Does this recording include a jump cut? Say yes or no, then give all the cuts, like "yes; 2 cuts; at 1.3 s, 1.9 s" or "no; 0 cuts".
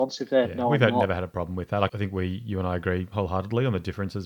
yes; 1 cut; at 1.9 s